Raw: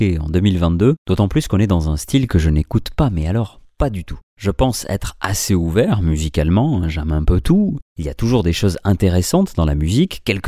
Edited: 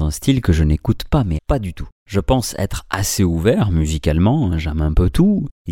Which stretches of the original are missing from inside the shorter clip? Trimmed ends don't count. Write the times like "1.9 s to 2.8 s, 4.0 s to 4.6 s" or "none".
3.2 s to 3.7 s